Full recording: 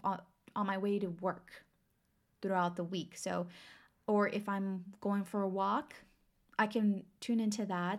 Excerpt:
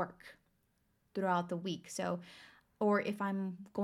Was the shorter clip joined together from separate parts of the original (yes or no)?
no